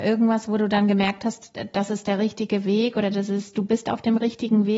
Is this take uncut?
yes; 0 cuts

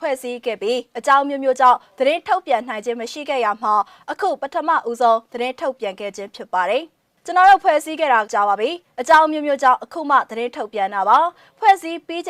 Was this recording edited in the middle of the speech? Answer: yes; 1 cut; at 8.3 s

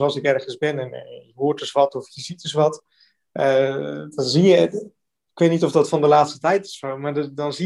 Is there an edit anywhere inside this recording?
no; 0 cuts

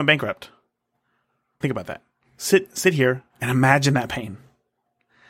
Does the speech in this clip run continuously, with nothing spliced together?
no; 2 cuts; at 1.6 s, 3.3 s

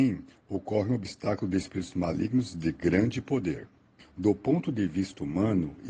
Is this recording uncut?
no; 1 cut; at 4.0 s

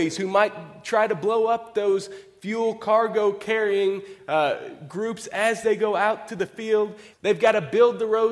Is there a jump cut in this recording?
yes; 1 cut; at 7.1 s

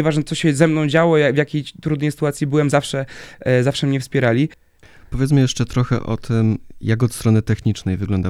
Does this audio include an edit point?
no; 0 cuts

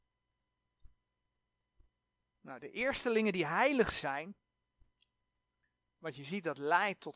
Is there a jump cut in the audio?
no; 0 cuts

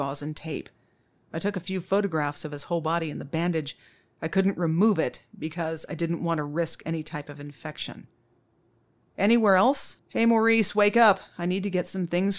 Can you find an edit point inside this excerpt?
yes; 1 cut; at 10.0 s

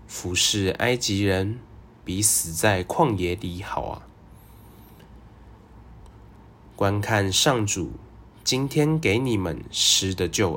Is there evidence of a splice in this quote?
yes; 1 cut; at 5.9 s

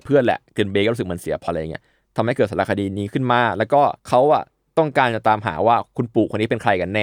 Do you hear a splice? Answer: yes; 2 cuts; at 1.5 s, 4.0 s

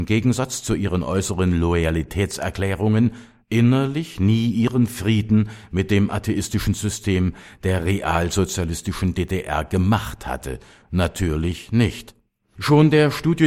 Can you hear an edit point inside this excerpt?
no; 0 cuts

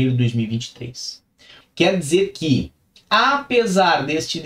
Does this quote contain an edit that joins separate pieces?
yes; 1 cut; at 1.6 s

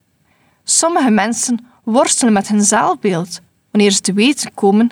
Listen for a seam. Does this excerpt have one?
no; 0 cuts

